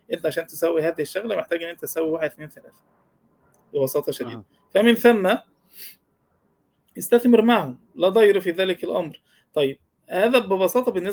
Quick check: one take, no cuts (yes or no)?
yes